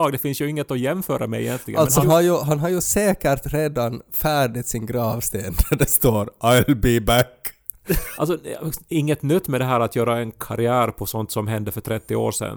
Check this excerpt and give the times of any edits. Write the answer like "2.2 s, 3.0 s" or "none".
2.0 s, 8.2 s